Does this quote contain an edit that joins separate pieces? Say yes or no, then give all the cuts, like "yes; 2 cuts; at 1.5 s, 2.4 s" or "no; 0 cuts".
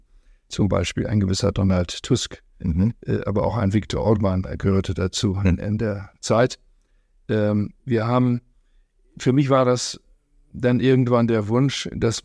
yes; 1 cut; at 7.8 s